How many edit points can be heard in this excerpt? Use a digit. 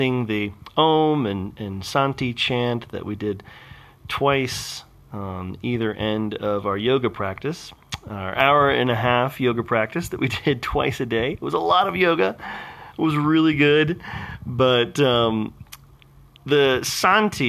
0